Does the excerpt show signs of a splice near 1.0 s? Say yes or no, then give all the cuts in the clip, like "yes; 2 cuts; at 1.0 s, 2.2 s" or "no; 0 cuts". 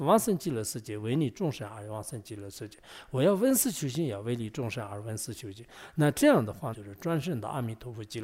no; 1 cut; at 6.7 s